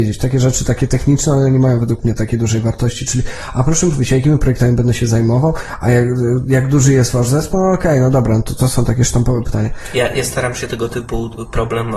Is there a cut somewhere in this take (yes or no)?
no